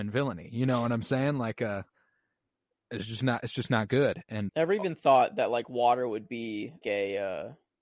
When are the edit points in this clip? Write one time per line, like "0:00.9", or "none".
0:04.5
0:06.8